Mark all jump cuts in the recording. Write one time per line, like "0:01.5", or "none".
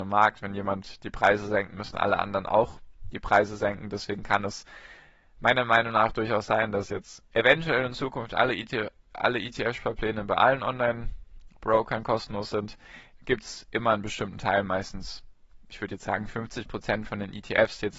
0:13.1